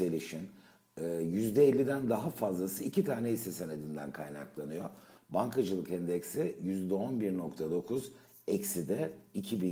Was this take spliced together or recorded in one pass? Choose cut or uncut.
cut